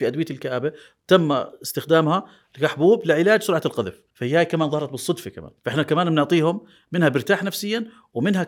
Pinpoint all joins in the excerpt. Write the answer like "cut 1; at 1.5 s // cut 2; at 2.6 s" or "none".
cut 1; at 4.1 s // cut 2; at 5.6 s